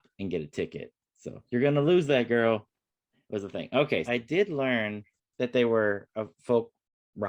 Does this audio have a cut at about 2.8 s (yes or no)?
no